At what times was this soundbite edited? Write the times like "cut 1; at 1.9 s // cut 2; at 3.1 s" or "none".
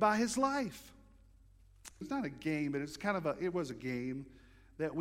cut 1; at 2.0 s